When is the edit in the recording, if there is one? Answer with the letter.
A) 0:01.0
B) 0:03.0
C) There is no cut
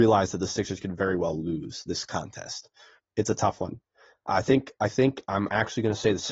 B